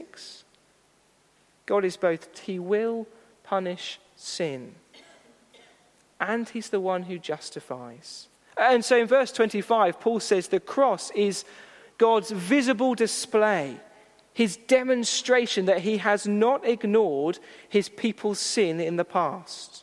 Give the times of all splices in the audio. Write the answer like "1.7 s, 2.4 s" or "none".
2.3 s, 8.4 s